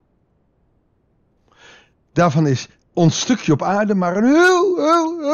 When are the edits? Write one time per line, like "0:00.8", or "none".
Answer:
none